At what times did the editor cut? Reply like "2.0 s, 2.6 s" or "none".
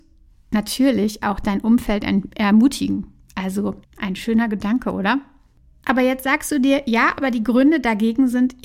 3.8 s